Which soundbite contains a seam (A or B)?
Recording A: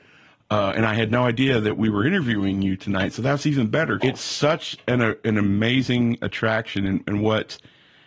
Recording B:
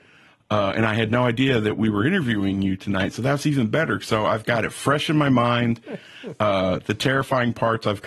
A